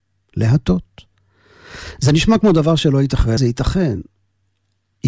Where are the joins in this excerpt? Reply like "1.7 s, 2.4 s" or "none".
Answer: 3.4 s